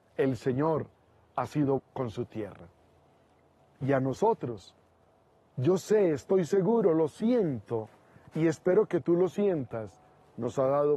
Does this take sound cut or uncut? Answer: cut